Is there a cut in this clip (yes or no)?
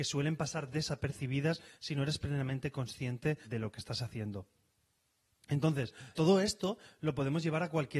yes